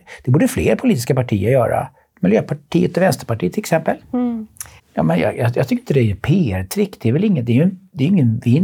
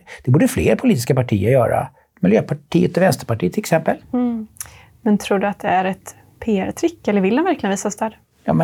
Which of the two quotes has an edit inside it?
first; 1 cut; at 4.8 s

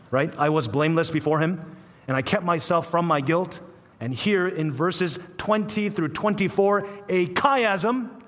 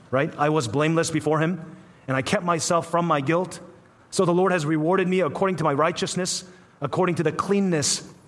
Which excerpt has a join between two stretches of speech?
first; 1 cut; at 3.9 s

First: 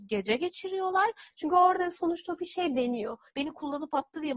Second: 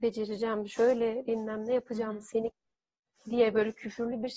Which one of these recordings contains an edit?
first; 2 cuts; at 1.3 s, 3.3 s

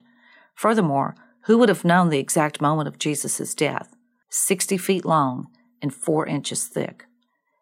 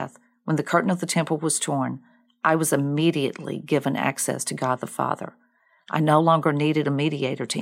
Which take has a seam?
first; 1 cut; at 4.2 s

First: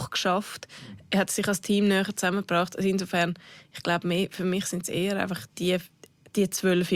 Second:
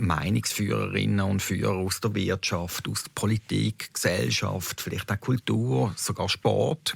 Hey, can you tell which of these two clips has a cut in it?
first; 1 cut; at 5.5 s

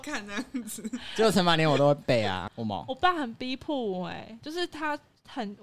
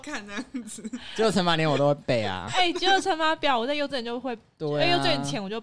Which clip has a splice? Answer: first; 1 cut; at 2.5 s

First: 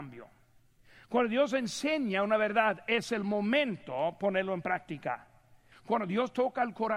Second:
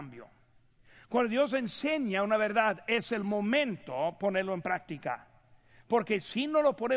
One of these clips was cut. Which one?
first; 1 cut; at 5.7 s

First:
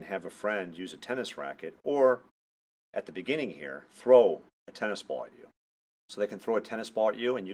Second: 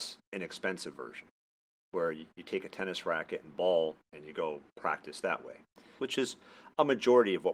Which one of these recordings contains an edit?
second; 1 cut; at 6.0 s

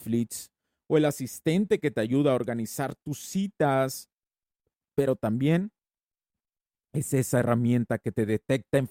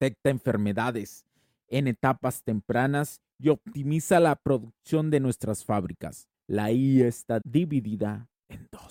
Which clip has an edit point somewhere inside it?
second; 2 cuts; at 6.3 s, 7.4 s

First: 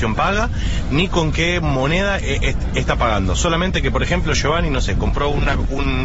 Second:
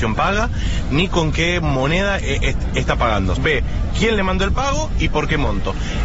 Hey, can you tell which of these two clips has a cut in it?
second; 1 cut; at 3.4 s

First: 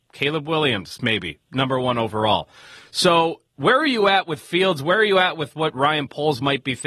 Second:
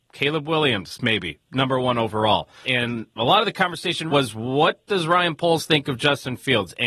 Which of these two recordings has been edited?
second; 2 cuts; at 2.6 s, 4.1 s

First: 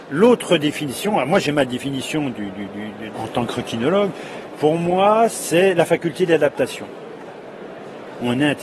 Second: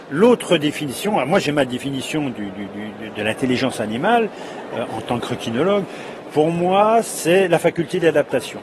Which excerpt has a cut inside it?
first; 1 cut; at 3.1 s

